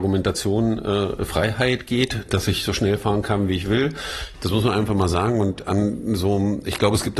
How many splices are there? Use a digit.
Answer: 1